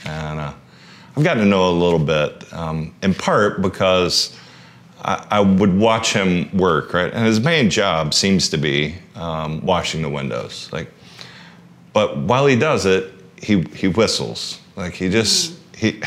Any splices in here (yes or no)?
no